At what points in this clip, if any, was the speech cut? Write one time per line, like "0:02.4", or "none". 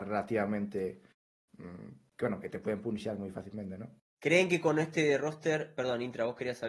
0:04.0